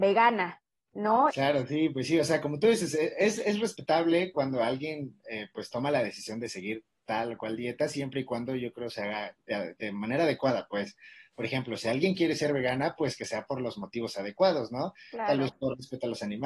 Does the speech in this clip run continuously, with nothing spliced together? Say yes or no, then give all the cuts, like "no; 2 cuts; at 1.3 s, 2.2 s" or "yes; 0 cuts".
no; 1 cut; at 1.3 s